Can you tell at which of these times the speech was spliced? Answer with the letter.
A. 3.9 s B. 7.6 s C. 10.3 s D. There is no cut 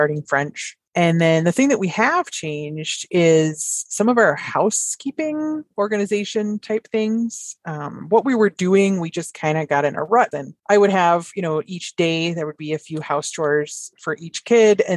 C